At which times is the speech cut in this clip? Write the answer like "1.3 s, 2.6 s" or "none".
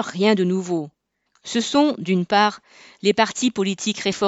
1.3 s

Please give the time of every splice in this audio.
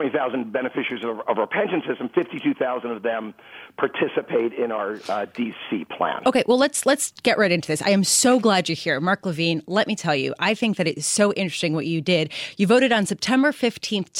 none

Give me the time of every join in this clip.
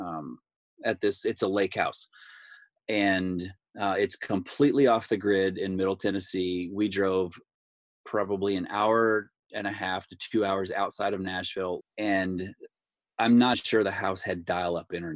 11.8 s, 13.5 s

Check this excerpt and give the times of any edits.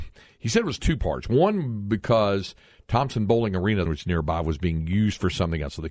3.9 s

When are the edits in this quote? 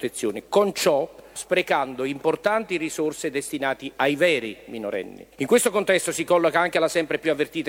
1.4 s, 5.3 s

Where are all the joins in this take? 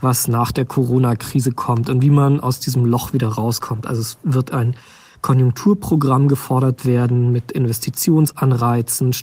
none

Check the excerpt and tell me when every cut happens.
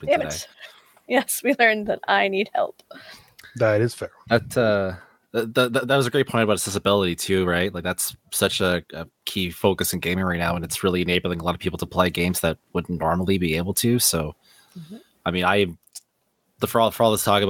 none

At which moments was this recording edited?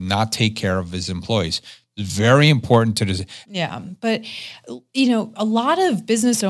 3.4 s

